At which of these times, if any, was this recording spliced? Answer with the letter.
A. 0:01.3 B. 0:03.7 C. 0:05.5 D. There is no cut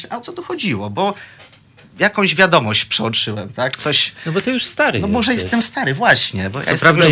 D